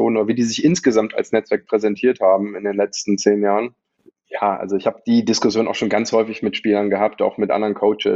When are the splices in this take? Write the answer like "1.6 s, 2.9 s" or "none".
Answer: none